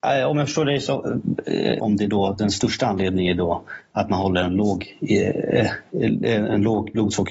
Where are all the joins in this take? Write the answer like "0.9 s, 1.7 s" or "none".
1.8 s